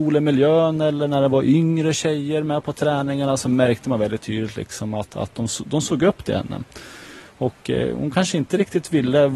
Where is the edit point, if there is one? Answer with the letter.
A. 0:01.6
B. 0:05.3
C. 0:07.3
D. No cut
D